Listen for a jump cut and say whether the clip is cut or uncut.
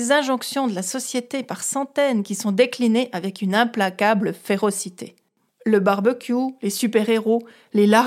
uncut